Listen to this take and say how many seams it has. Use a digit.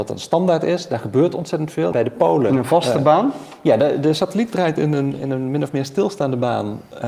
1